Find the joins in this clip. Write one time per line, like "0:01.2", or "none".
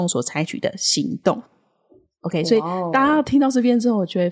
none